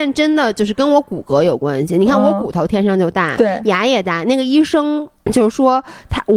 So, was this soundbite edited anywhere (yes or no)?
no